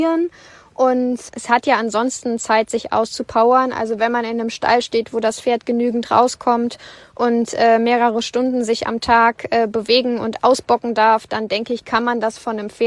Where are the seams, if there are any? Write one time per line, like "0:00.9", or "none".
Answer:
none